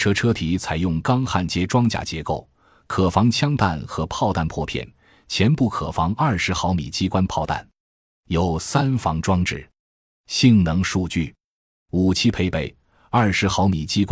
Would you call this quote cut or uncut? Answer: cut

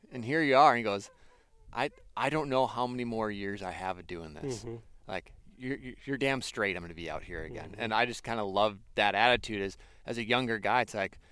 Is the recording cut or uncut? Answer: cut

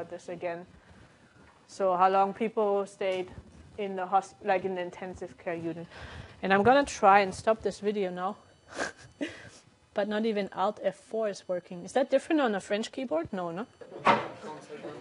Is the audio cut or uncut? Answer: uncut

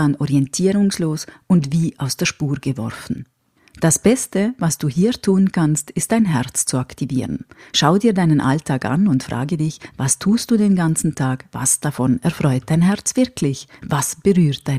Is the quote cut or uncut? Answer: uncut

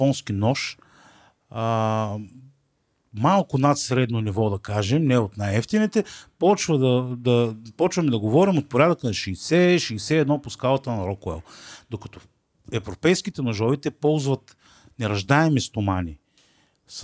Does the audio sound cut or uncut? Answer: uncut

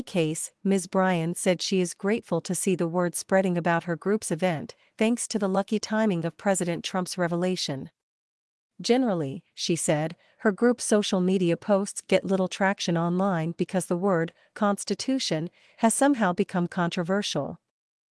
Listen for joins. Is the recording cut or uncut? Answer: uncut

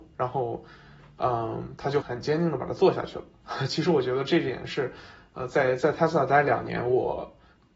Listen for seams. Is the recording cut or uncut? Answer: cut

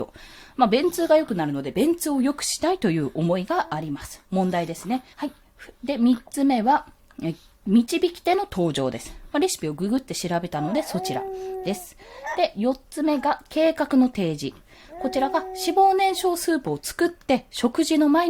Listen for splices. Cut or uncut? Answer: cut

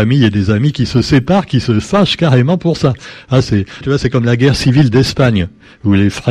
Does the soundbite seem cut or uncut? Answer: cut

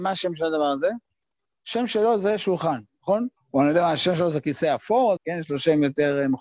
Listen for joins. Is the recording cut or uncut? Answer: cut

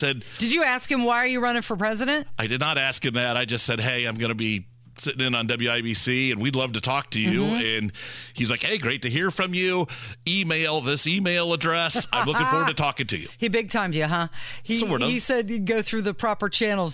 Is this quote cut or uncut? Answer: uncut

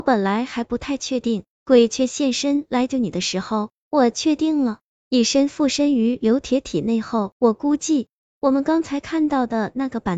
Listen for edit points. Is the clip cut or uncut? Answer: cut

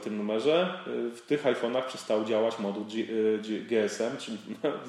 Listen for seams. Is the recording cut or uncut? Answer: uncut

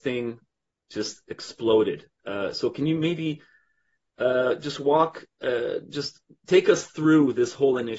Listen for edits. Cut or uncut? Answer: uncut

